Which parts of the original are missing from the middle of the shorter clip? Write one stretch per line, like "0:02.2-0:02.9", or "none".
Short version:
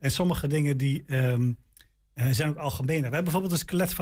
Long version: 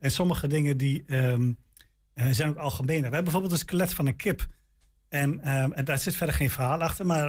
none